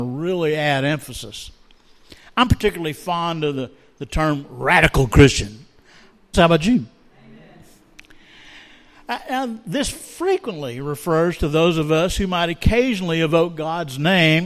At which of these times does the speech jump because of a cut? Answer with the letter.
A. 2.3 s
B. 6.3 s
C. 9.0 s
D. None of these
B